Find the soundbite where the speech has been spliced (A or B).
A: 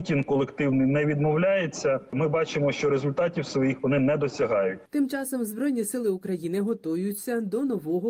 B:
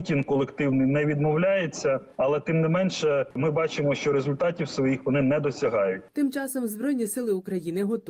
A